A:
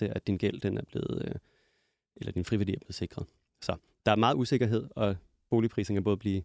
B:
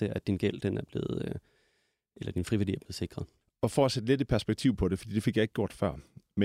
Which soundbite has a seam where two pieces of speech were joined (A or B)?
B